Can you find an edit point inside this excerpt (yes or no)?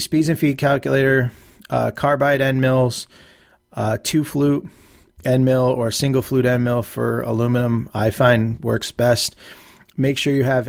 no